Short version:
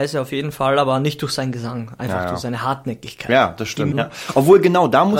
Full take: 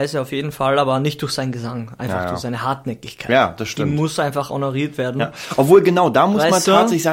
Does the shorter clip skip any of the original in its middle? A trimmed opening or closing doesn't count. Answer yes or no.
yes